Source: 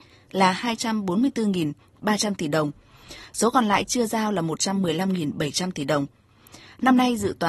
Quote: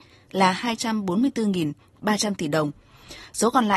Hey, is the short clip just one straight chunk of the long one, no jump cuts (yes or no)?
yes